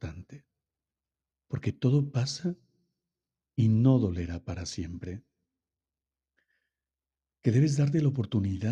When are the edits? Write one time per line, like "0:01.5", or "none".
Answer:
none